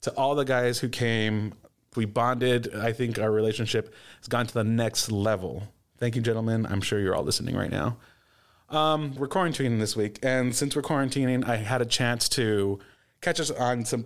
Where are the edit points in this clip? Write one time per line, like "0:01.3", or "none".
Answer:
0:01.9
0:09.2